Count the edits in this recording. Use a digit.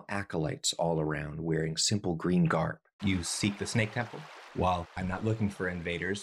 2